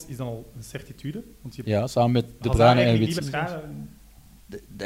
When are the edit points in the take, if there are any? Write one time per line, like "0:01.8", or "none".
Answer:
0:03.2